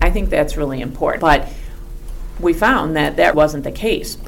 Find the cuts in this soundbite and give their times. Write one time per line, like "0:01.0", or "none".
0:01.2
0:03.3